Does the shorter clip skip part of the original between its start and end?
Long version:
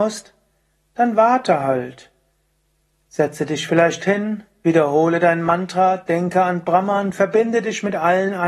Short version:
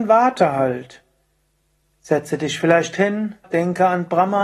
yes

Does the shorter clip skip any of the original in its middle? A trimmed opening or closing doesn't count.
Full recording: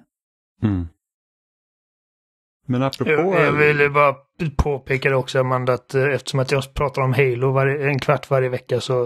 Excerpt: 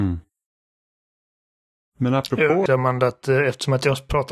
yes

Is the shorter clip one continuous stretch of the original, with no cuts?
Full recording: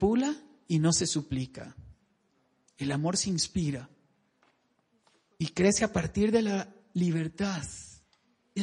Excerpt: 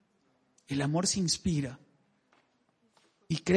yes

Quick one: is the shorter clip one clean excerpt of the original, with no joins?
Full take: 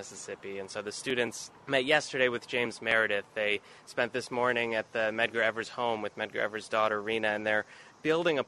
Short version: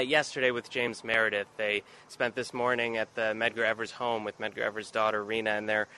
yes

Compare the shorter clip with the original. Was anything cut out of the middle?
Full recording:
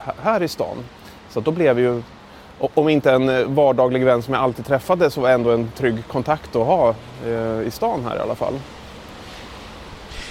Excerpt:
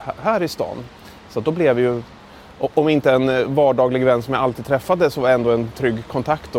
no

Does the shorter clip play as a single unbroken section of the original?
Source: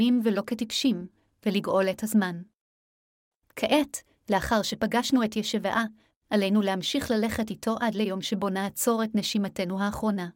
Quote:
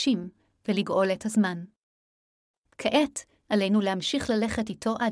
no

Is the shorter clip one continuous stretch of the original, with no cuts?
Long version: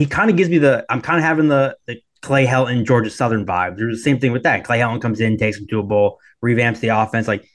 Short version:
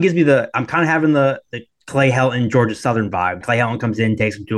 no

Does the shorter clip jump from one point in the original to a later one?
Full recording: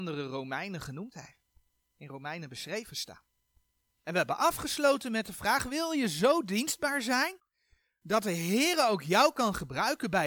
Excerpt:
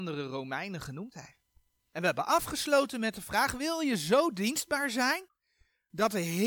yes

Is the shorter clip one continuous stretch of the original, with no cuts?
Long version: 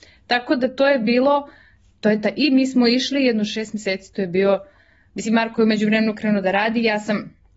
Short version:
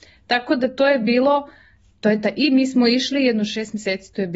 yes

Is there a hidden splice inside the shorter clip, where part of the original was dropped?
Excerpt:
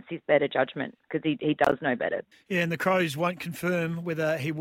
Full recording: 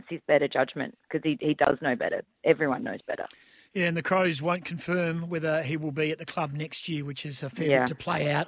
yes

